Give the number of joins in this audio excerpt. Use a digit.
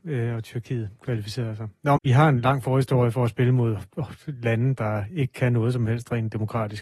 1